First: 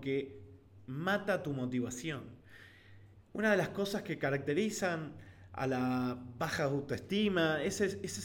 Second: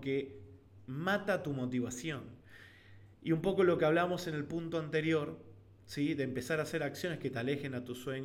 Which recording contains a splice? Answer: first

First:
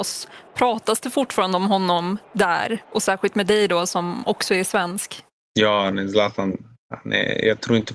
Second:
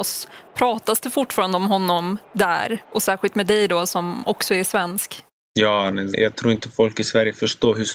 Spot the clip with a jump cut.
second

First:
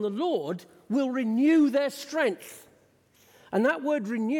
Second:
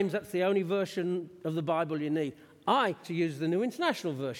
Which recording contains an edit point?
second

